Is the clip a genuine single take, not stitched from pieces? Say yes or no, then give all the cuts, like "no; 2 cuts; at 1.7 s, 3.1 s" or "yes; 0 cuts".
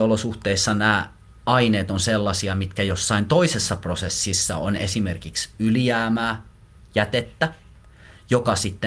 yes; 0 cuts